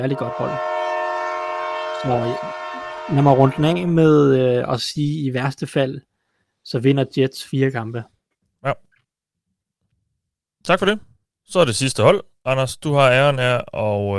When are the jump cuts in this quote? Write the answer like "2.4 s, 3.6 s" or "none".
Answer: 8.6 s